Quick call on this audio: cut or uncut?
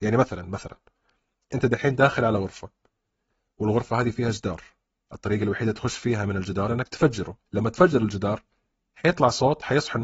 cut